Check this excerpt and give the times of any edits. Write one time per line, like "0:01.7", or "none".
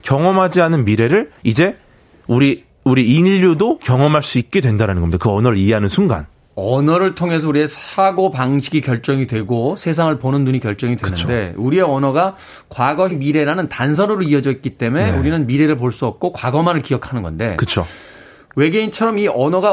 0:13.1